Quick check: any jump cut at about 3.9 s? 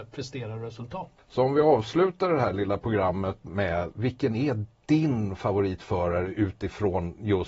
yes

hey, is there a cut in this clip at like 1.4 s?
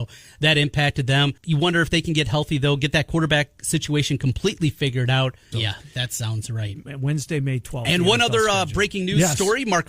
yes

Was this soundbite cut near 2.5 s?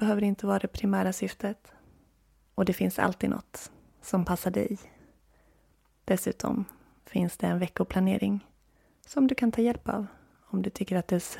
yes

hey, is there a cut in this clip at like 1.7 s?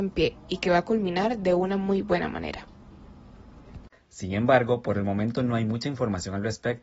no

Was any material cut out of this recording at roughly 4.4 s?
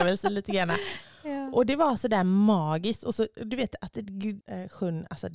yes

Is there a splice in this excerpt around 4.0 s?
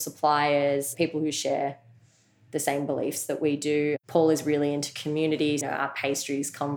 no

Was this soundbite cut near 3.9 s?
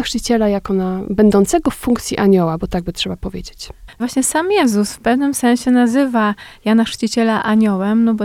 yes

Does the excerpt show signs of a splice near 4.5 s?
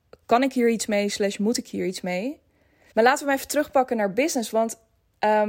no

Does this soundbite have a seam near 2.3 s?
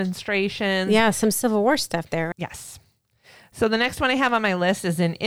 yes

